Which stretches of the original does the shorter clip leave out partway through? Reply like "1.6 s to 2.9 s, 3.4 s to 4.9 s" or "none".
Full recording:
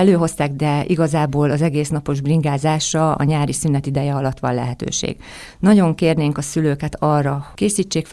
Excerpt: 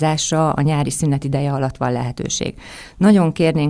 none